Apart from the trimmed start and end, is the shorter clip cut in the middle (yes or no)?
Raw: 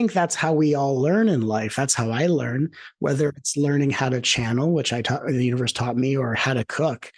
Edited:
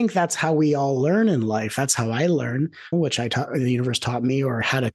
yes